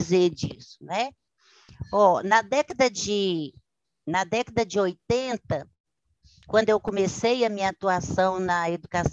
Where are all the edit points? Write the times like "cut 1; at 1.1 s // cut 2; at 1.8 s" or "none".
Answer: none